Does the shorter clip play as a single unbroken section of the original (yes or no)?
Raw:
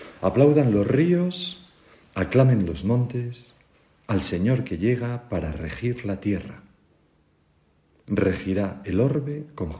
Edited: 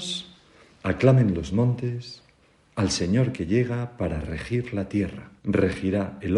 no